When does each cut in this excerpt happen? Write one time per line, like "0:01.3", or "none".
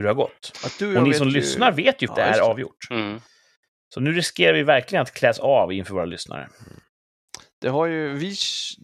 0:02.1